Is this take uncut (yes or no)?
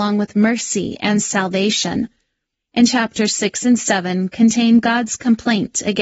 no